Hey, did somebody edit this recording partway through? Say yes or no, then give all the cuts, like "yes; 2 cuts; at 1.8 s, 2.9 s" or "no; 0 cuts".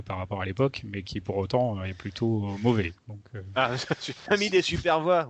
yes; 1 cut; at 4.3 s